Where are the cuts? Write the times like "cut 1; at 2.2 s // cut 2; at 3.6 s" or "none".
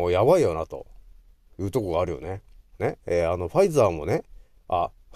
cut 1; at 2.7 s